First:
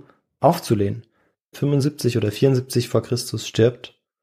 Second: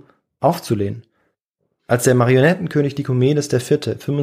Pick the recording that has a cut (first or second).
first